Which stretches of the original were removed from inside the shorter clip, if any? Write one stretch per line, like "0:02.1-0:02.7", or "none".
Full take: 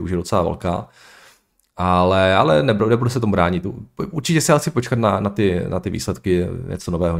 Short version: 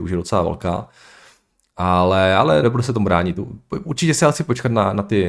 0:02.6-0:02.9